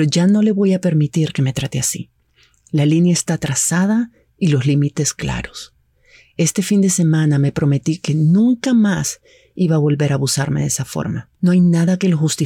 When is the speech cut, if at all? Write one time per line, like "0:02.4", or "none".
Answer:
none